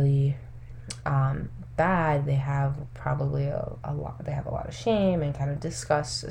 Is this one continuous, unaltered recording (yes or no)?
yes